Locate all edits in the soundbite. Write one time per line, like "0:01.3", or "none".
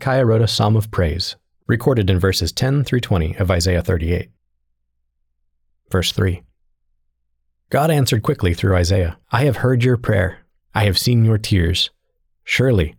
0:05.7
0:09.2